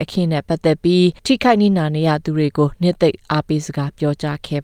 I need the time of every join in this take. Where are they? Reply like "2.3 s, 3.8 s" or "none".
1.2 s